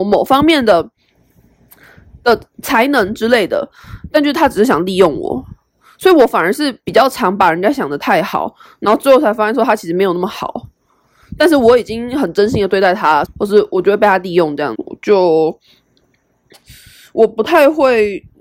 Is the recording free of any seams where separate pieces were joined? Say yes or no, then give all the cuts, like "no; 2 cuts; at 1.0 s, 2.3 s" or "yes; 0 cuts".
no; 2 cuts; at 13.2 s, 14.7 s